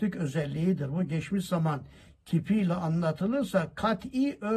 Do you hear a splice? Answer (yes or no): no